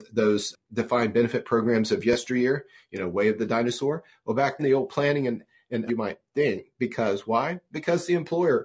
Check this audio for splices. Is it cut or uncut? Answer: cut